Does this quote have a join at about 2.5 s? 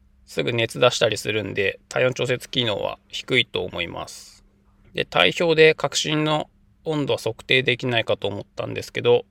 no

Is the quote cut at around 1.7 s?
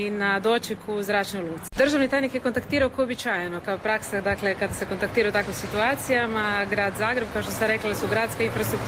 yes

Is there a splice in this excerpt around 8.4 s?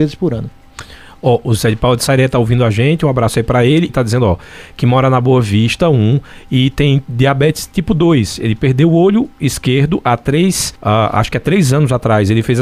no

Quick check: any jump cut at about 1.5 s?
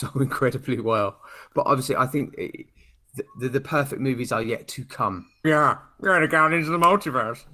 no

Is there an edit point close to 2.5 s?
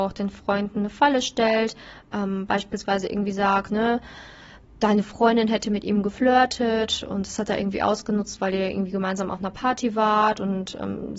no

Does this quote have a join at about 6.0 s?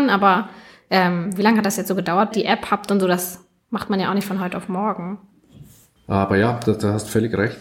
yes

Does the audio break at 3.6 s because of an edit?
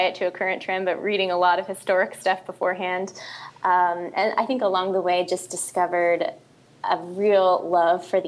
no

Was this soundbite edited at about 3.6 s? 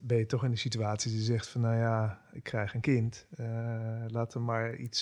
no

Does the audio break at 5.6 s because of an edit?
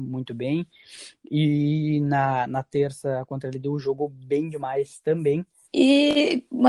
yes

